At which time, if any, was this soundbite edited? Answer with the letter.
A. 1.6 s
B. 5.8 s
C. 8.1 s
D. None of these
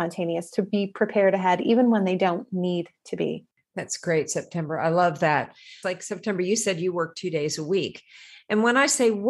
B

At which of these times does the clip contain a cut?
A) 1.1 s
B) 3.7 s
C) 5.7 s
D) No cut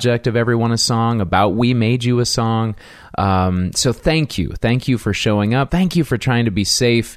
C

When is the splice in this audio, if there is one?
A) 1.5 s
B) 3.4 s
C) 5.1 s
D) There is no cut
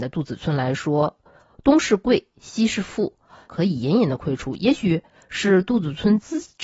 B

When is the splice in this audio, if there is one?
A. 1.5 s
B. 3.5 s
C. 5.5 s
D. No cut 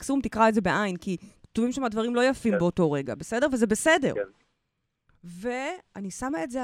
D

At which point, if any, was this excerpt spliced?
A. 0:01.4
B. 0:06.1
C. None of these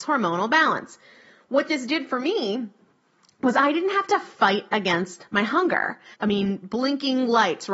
B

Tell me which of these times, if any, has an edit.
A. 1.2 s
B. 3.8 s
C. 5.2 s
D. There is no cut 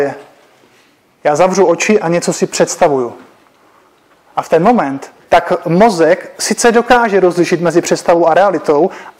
C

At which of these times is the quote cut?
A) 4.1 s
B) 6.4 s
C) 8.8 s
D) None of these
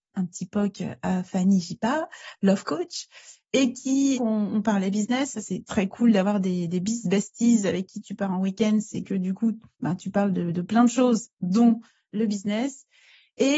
A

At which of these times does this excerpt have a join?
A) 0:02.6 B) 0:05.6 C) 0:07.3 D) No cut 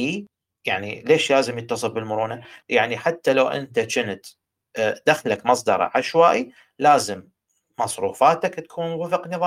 A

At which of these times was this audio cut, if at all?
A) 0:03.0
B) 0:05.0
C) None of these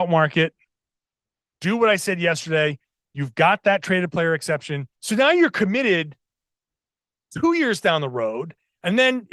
B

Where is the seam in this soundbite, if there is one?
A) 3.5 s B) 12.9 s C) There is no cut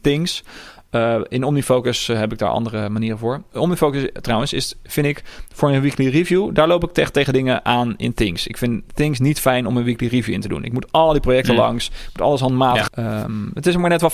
B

